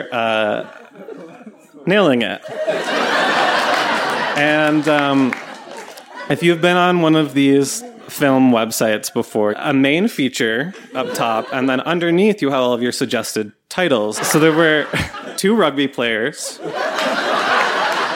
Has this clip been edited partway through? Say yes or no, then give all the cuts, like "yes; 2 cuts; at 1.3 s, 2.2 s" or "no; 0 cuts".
yes; 3 cuts; at 9.5 s, 14.2 s, 15.4 s